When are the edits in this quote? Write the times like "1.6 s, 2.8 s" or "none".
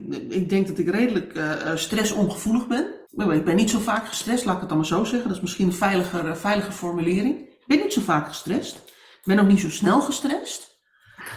3.1 s